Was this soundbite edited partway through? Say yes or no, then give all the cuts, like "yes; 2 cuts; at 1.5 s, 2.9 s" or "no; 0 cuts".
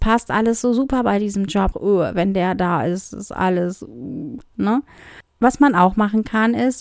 yes; 1 cut; at 1.7 s